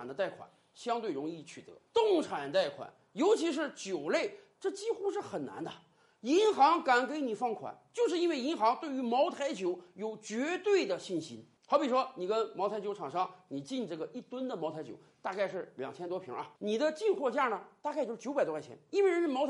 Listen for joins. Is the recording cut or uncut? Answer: cut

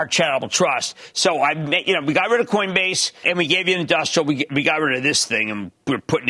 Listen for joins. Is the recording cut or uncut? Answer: cut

